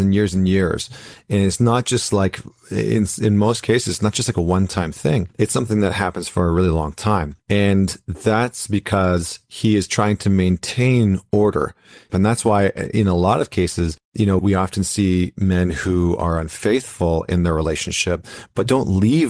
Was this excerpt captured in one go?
no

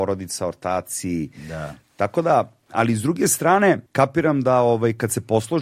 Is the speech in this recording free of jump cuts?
no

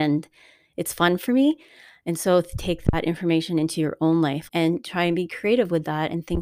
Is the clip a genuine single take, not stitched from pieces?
no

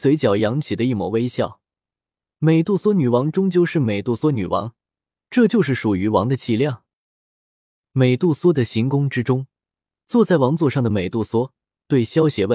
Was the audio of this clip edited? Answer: no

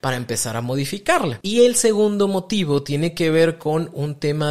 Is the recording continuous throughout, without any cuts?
yes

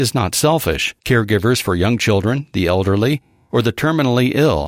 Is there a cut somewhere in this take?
yes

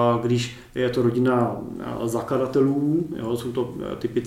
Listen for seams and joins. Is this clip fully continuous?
yes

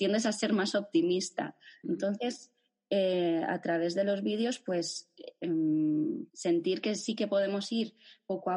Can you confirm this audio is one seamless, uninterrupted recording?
no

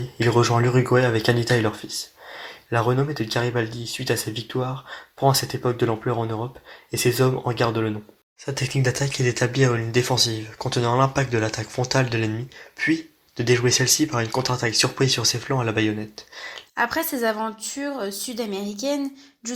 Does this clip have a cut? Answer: yes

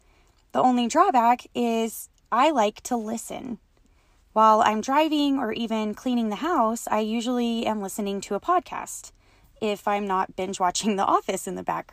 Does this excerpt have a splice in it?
no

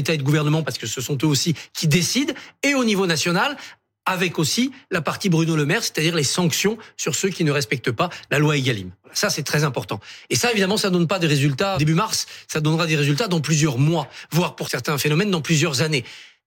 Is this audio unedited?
no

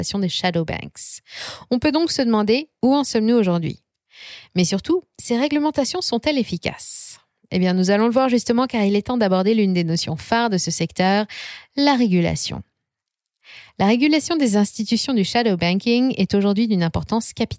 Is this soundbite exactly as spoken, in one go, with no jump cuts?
yes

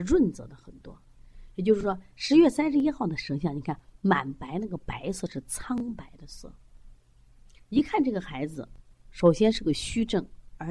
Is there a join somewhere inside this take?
no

